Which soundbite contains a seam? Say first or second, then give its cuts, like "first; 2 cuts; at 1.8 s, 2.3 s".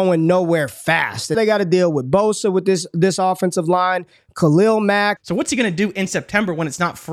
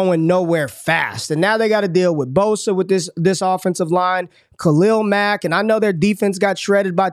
first; 2 cuts; at 1.3 s, 5.2 s